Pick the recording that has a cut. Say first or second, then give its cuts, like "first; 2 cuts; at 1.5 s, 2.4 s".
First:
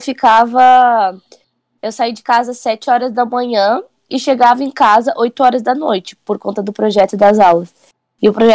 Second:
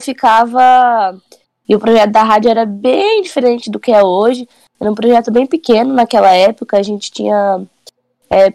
second; 1 cut; at 1.5 s